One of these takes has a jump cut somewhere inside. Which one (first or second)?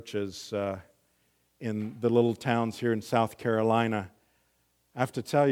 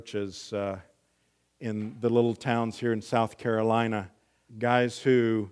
second